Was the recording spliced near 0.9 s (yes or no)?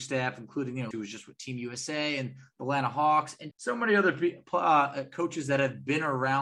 yes